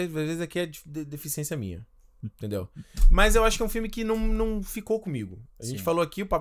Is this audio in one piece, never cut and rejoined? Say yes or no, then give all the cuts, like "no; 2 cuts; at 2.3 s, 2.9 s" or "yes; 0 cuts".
yes; 0 cuts